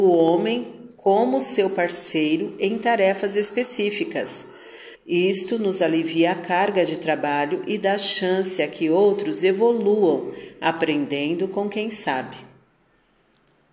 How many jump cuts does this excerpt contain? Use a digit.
1